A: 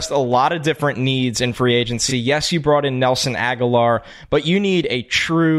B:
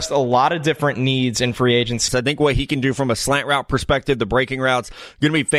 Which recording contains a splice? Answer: B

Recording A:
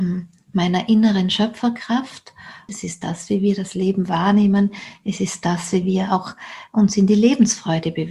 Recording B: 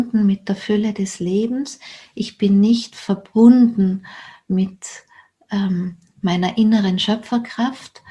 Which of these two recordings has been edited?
A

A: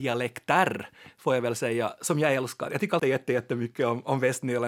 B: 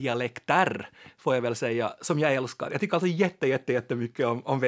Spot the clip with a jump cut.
A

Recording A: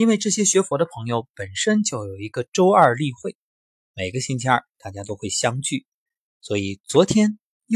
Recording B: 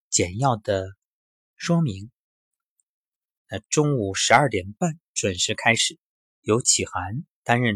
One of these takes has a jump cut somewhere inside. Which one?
B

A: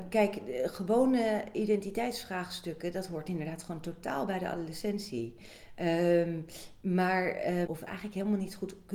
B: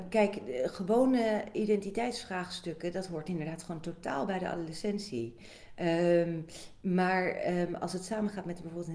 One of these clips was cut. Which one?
A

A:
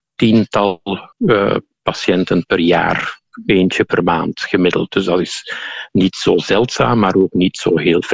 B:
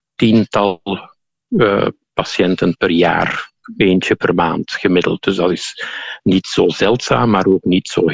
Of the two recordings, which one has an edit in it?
A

